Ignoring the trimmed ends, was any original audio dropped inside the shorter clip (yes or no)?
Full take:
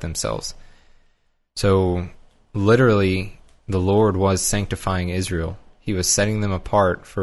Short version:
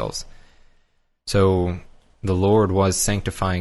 yes